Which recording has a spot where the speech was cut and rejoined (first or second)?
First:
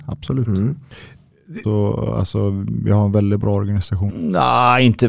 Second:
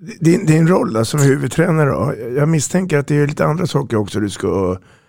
first